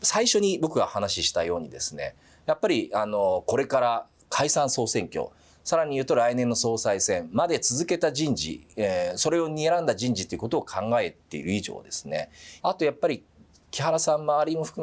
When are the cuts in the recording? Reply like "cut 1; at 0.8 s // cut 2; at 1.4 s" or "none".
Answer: cut 1; at 12.6 s